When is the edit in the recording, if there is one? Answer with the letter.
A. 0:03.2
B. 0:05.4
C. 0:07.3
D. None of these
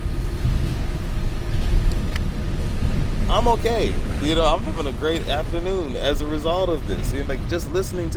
C